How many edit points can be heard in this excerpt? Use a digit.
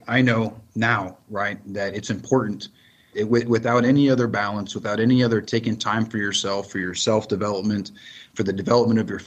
1